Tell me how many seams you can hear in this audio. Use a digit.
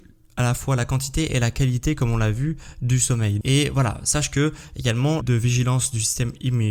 2